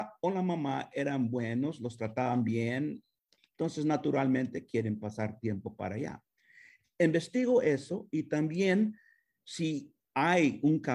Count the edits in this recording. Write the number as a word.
one